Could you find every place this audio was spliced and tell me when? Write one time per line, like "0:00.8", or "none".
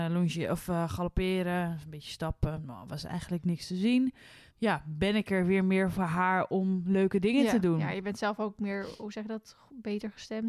0:04.5